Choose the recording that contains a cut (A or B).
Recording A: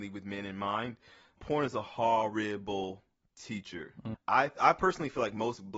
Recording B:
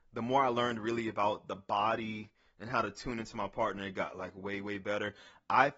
A